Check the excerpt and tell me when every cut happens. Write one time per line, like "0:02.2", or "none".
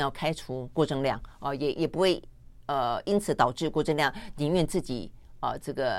0:01.7